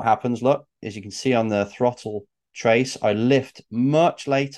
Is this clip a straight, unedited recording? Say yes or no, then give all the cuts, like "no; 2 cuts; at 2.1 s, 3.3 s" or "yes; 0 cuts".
yes; 0 cuts